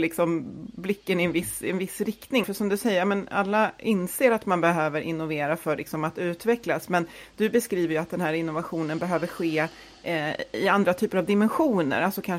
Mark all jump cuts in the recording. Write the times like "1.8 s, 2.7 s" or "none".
2.4 s